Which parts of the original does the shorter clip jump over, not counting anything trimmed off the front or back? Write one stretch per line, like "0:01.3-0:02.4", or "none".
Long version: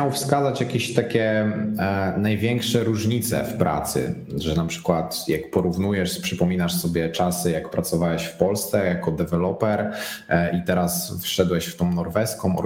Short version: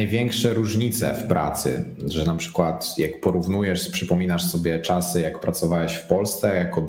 none

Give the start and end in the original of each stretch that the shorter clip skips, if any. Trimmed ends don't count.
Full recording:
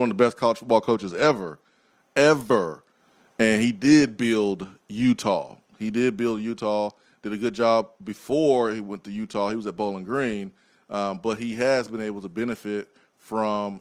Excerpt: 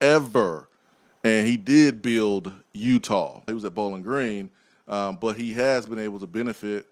0:05.6-0:09.5

